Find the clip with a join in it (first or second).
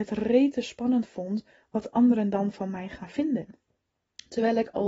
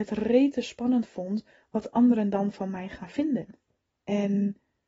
second